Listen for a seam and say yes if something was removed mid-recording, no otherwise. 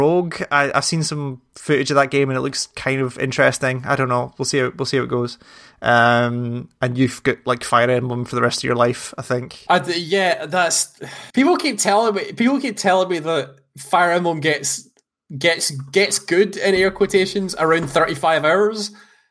yes